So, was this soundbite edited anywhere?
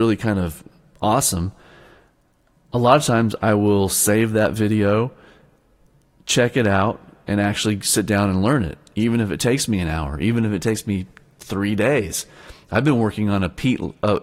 no; 0 cuts

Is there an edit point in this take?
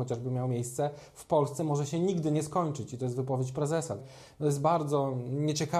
yes; 1 cut; at 4.0 s

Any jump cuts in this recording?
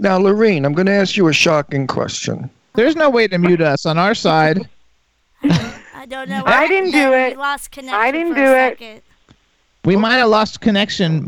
yes; 1 cut; at 2.7 s

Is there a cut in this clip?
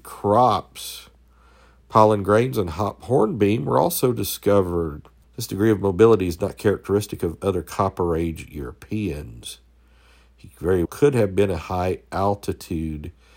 yes; 2 cuts; at 5.2 s, 10.8 s

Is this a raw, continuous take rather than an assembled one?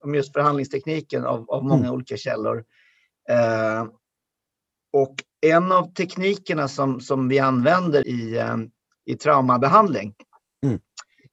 no; 1 cut; at 8.0 s

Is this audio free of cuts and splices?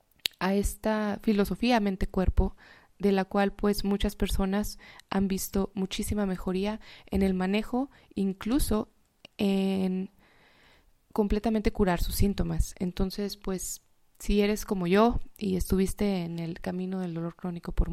yes; 0 cuts

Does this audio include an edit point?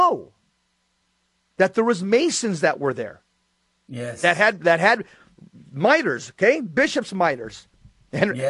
no; 0 cuts

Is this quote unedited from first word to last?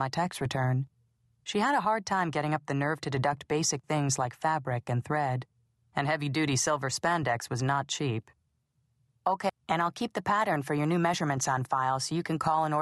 no; 2 cuts; at 1.3 s, 9.5 s

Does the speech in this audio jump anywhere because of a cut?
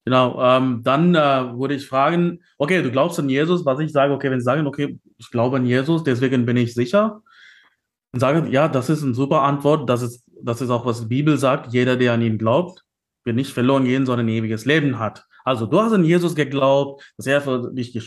no; 0 cuts

